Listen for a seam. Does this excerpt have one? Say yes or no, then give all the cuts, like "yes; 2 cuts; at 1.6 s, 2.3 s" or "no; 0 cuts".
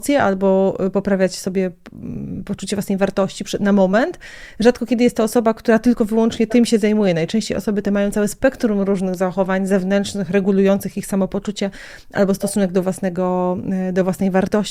no; 0 cuts